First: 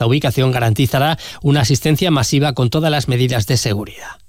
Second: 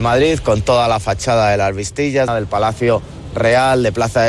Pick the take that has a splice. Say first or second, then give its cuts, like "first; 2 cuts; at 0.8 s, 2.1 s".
second; 1 cut; at 2.3 s